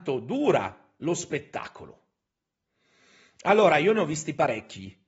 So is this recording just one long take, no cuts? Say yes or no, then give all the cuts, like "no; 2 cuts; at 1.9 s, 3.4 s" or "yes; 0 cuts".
yes; 0 cuts